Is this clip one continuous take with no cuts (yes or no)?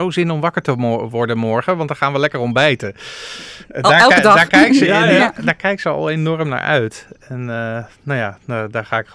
yes